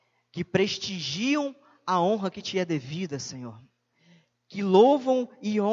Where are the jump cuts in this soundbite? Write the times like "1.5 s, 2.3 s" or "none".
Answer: 4.3 s